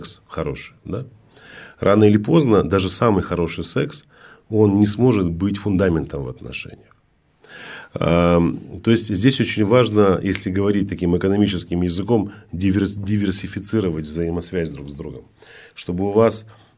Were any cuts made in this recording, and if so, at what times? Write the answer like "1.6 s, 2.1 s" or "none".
none